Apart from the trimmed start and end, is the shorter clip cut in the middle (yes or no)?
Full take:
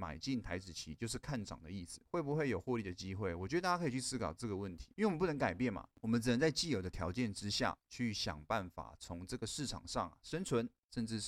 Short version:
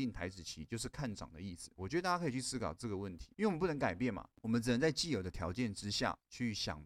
yes